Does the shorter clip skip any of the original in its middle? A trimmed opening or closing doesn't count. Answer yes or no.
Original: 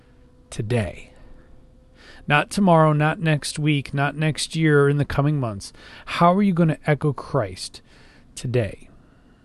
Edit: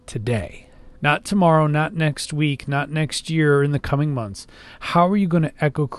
yes